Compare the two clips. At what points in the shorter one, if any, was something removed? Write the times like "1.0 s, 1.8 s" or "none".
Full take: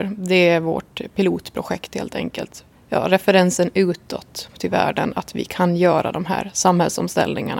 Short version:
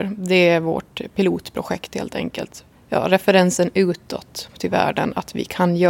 none